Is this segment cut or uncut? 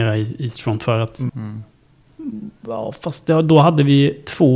cut